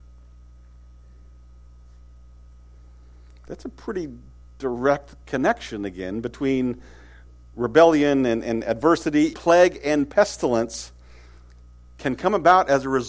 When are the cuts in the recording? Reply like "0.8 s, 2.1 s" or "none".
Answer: 9.3 s